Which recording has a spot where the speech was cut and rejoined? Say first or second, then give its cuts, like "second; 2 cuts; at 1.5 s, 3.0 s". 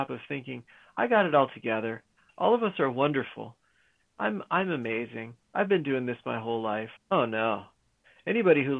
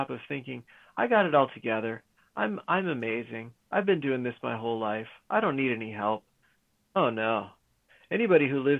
first; 3 cuts; at 2.3 s, 4.1 s, 7.0 s